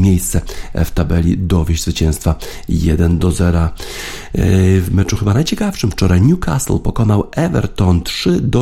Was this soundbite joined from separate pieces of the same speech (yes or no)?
no